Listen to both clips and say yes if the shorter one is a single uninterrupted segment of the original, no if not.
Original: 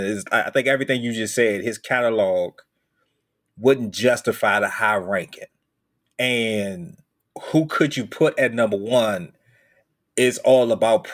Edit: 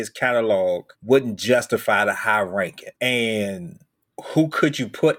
no